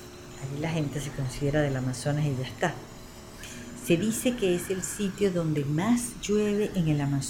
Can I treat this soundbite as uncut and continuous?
yes; 0 cuts

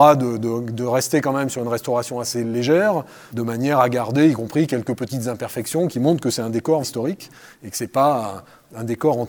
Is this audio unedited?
no; 1 cut; at 6.8 s

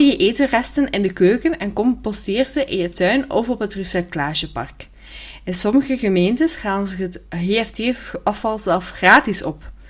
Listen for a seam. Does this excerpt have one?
no; 0 cuts

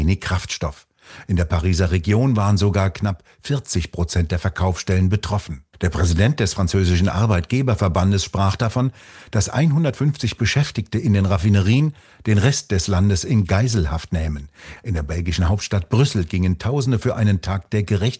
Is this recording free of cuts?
no; 2 cuts; at 5.7 s, 14.8 s

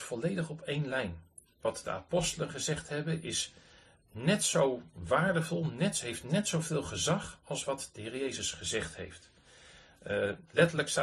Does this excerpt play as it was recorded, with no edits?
yes; 0 cuts

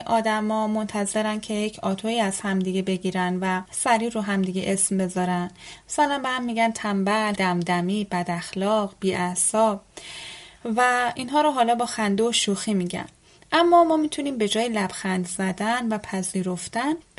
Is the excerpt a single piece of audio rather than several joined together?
no; 1 cut; at 7.4 s

